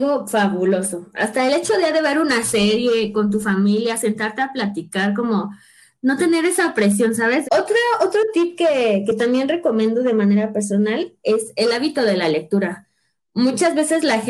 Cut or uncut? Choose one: cut